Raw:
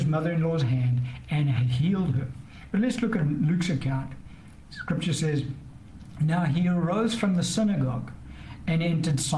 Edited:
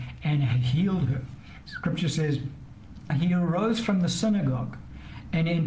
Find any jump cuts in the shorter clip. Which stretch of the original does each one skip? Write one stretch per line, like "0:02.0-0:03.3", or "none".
0:02.7-0:04.7
0:06.1-0:06.4